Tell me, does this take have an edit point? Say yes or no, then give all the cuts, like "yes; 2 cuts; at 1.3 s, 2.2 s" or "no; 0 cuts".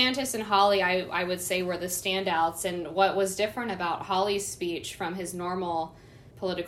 no; 0 cuts